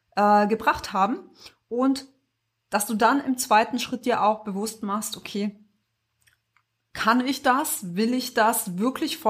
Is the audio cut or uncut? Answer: uncut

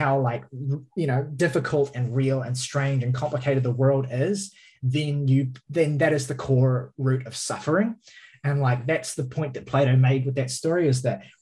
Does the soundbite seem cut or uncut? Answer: uncut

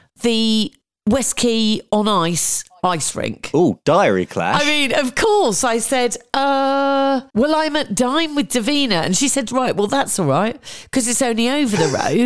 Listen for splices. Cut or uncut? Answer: cut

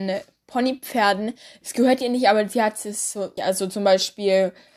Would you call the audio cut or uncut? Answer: cut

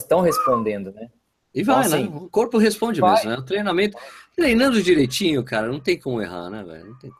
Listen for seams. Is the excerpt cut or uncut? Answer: uncut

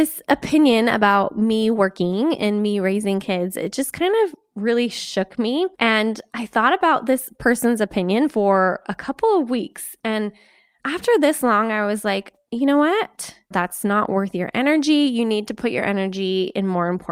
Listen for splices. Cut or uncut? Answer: cut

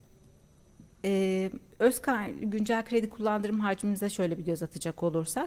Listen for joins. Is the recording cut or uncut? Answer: uncut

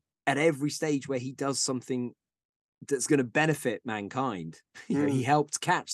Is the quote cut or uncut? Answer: uncut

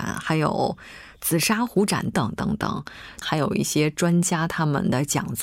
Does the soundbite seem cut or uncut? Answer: cut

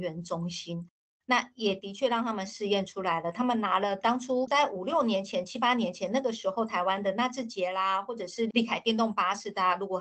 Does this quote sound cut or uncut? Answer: uncut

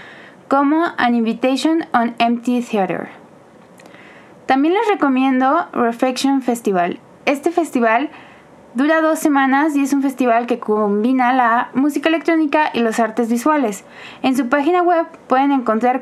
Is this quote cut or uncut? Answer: uncut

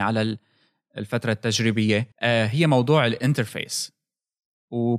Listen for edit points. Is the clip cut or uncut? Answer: cut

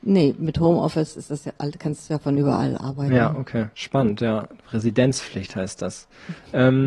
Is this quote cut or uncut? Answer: cut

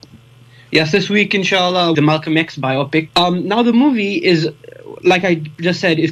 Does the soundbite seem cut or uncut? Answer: cut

